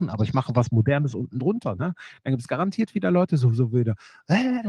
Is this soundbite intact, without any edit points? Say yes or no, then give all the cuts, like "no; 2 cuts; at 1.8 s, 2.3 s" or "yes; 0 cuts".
yes; 0 cuts